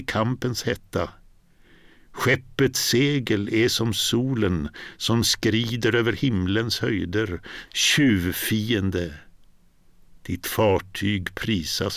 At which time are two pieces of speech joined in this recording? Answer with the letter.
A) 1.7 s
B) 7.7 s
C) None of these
B